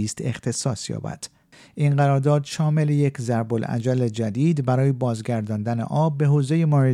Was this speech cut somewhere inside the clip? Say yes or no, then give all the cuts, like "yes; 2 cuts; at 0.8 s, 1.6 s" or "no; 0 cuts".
no; 0 cuts